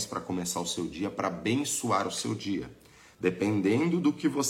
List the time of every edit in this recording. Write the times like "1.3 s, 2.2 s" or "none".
3.1 s